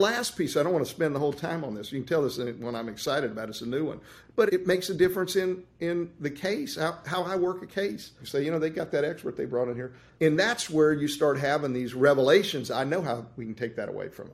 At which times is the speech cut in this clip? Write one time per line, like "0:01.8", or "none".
0:04.5
0:08.2
0:10.2